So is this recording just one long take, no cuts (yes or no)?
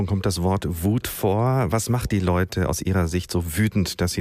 yes